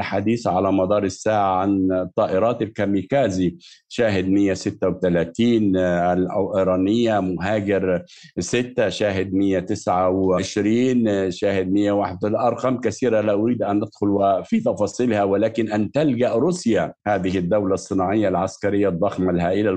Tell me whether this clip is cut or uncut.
cut